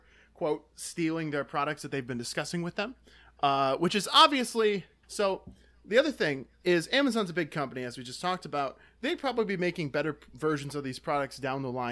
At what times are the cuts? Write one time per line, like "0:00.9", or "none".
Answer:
0:05.0